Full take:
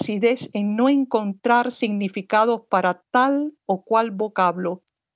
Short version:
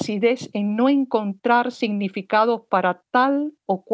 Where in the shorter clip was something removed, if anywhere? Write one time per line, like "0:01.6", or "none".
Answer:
none